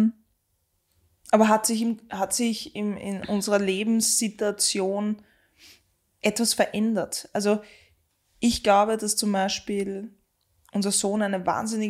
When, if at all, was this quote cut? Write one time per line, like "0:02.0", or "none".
none